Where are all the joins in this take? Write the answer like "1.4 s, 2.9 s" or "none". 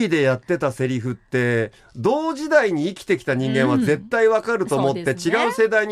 none